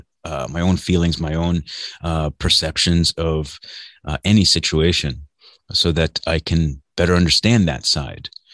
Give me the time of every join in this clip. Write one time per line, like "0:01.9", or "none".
0:01.2

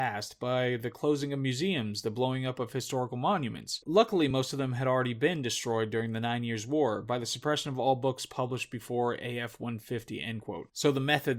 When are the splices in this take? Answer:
none

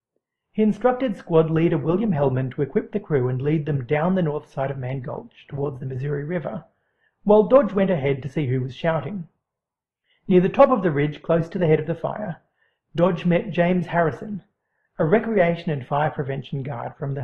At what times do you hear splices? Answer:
none

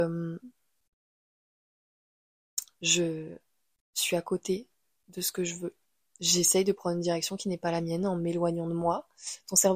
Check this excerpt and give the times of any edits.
none

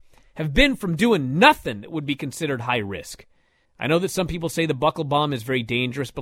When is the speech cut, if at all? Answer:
0:03.7

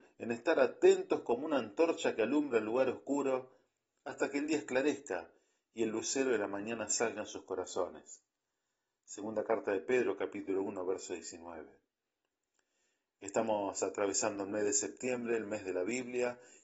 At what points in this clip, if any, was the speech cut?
none

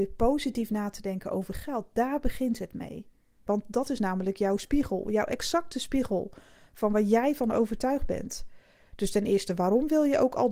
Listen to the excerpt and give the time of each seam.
0:03.5

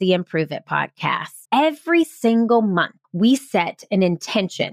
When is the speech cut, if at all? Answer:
0:01.4
0:03.0

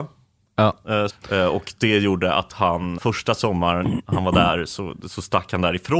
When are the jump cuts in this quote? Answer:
0:01.1
0:03.0

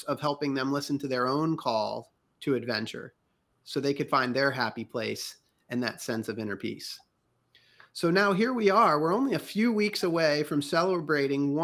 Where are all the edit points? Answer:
none

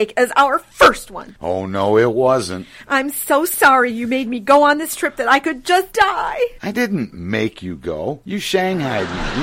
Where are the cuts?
none

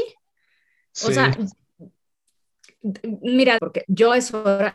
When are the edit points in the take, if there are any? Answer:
0:03.6

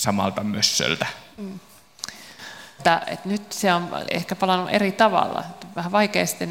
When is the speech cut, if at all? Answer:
0:02.8
0:04.1

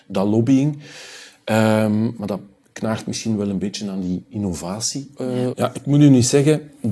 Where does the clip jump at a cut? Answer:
0:05.5

